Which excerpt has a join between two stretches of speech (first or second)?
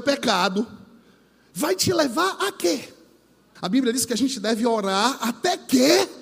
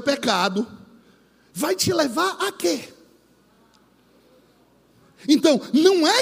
first